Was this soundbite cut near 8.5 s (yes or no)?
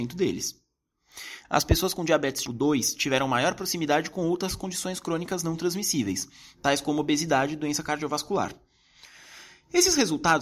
no